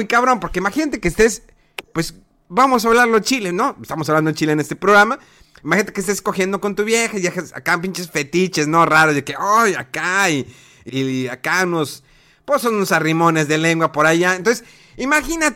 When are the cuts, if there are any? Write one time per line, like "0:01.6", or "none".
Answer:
0:10.9